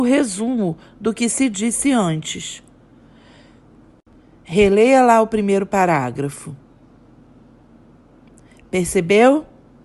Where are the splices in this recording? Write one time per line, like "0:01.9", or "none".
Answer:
none